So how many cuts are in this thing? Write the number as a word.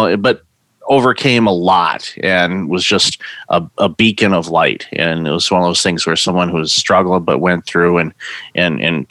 zero